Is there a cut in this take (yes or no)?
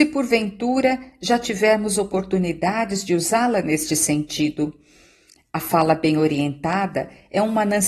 no